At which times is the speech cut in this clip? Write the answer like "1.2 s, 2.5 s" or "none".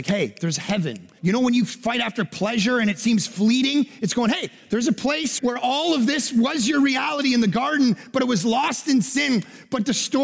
1.2 s, 5.4 s